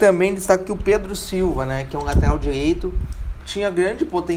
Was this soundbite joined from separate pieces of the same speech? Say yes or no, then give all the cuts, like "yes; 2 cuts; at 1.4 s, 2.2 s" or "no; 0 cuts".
no; 0 cuts